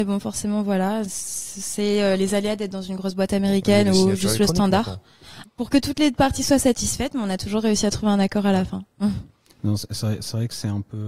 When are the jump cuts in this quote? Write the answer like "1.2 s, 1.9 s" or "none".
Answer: 5.4 s